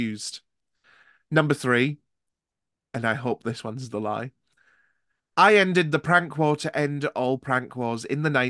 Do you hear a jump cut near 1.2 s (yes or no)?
no